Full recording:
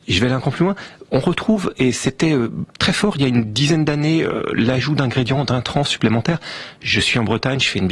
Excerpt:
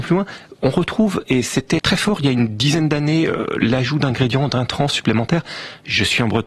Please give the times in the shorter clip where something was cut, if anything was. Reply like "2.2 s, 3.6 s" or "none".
1.8 s